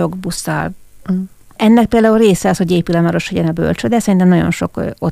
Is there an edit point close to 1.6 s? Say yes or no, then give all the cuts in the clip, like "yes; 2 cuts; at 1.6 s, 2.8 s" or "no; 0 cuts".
yes; 1 cut; at 1.6 s